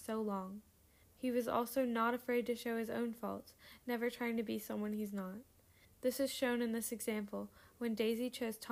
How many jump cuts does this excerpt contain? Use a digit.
2